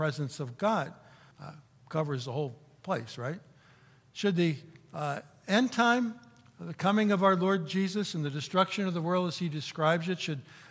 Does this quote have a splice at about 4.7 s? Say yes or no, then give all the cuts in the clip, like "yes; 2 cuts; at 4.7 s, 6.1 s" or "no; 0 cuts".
no; 1 cut; at 1.3 s